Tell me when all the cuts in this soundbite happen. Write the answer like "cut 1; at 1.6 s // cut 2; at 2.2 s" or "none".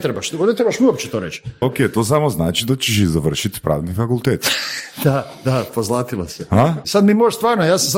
cut 1; at 1.6 s // cut 2; at 6.8 s